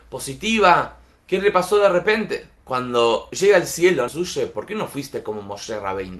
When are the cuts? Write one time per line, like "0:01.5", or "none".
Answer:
0:02.6
0:04.1

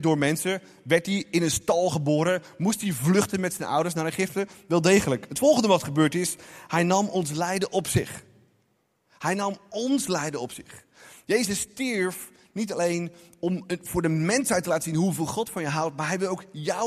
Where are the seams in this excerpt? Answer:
none

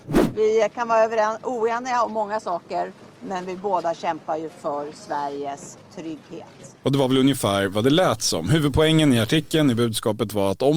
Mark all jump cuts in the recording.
0:03.2
0:06.8

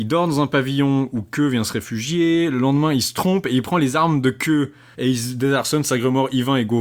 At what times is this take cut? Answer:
0:04.9

